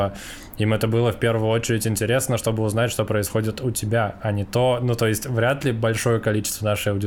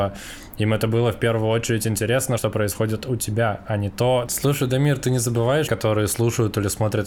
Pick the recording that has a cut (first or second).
second